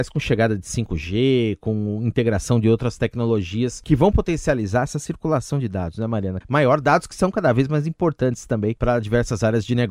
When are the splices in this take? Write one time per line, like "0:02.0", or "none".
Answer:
0:06.4